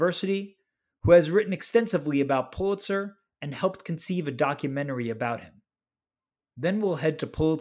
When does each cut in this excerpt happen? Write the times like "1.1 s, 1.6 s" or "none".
none